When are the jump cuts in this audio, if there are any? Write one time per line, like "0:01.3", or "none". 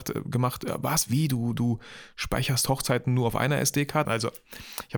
0:04.0